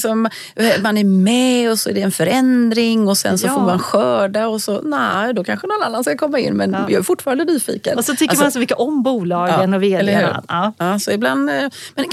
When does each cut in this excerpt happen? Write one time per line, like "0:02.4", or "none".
none